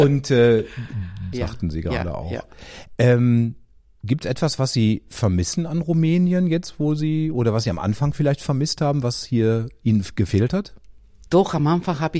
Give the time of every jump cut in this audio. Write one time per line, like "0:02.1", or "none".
0:01.3